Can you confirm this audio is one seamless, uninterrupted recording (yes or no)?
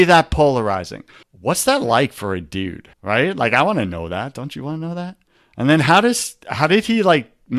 no